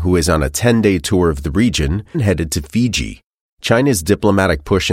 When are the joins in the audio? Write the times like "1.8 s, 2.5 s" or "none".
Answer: 2.1 s